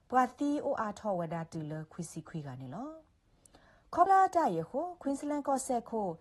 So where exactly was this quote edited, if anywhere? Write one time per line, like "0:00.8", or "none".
0:04.1